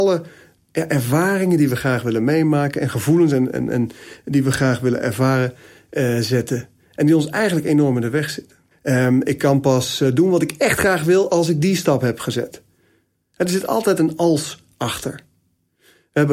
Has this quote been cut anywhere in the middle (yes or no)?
yes